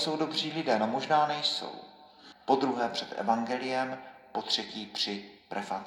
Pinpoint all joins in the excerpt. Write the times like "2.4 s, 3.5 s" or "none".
2.3 s